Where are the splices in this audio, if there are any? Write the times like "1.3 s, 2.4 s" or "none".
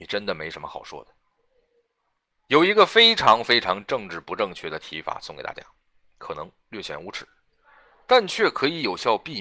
none